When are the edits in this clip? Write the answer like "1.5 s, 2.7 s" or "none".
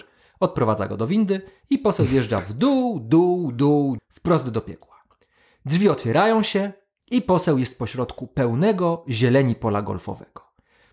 4.0 s